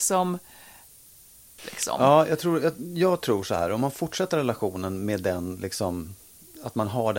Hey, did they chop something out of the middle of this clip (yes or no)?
yes